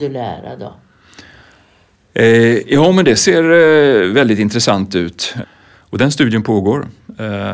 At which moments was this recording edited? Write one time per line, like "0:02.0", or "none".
0:05.4